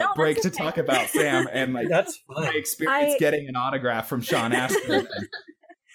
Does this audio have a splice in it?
no; 0 cuts

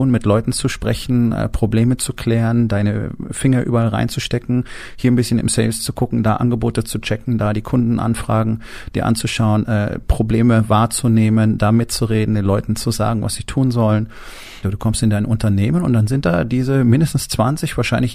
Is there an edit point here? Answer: yes; 1 cut; at 14.6 s

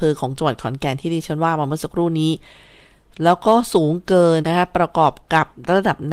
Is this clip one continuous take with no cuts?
no; 1 cut; at 4.4 s

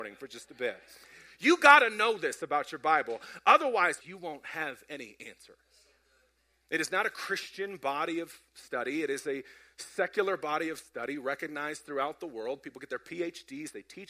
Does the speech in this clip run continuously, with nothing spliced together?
no; 2 cuts; at 4.0 s, 6.6 s

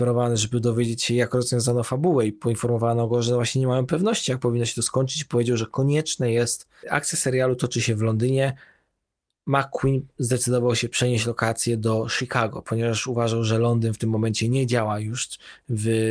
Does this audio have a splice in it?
yes; 1 cut; at 6.8 s

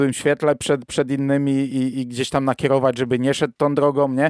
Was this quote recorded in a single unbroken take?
yes; 0 cuts

